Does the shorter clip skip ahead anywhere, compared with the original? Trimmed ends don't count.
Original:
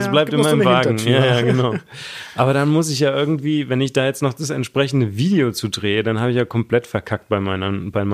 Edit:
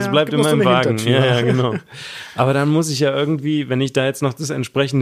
no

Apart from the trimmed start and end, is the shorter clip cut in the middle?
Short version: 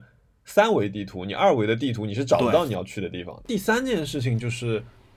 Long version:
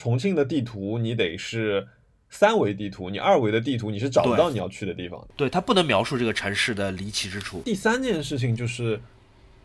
yes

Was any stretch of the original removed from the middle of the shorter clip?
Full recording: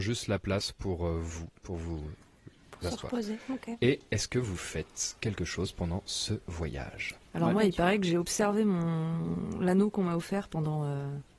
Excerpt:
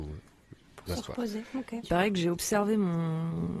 yes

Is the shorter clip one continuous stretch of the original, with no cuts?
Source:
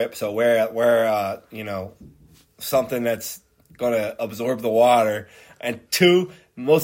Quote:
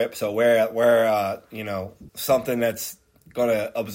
no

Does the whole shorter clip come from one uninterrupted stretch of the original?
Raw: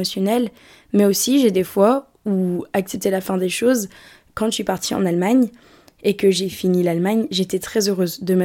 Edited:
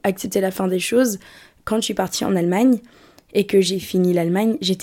yes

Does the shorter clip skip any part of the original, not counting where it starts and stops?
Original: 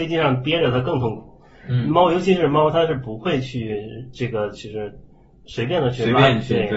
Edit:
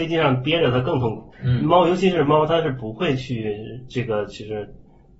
yes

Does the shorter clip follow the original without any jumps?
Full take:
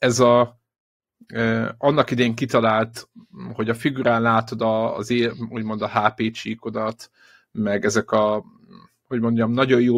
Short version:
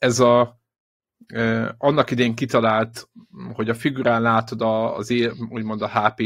yes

